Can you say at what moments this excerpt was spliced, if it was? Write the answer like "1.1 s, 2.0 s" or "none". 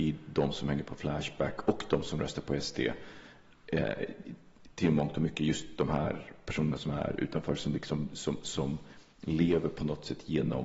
none